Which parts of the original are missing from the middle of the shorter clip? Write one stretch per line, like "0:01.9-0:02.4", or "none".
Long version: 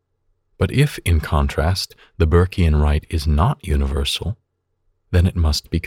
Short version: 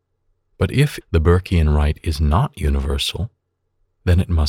0:01.0-0:02.1